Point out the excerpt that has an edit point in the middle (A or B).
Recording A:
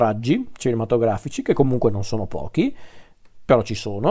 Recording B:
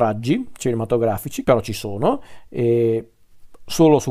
B